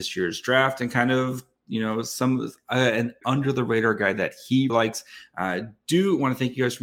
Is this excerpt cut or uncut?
cut